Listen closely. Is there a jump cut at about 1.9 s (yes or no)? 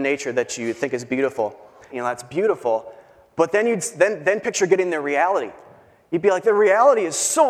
yes